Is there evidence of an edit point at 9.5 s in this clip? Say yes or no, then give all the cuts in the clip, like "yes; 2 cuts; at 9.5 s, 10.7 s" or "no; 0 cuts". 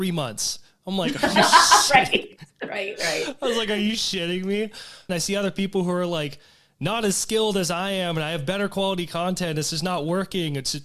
no; 1 cut; at 5.1 s